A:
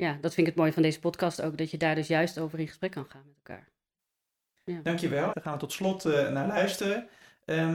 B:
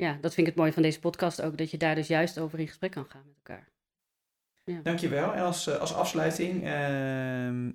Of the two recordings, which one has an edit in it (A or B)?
A